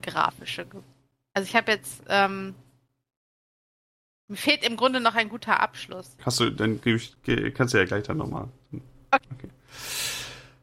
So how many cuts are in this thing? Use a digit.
1